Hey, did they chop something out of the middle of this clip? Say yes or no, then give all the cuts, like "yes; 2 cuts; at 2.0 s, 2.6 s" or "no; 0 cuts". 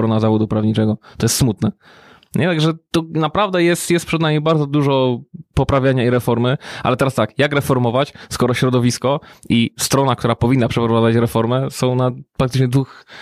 no; 0 cuts